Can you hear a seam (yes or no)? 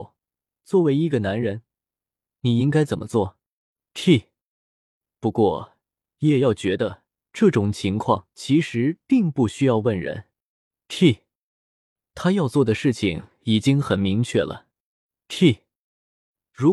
yes